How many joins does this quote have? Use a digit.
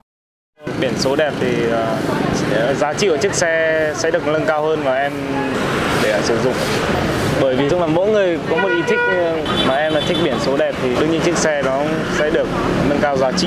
2